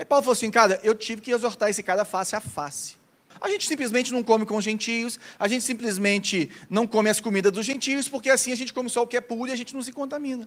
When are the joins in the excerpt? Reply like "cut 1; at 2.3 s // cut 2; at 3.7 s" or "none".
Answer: cut 1; at 3.3 s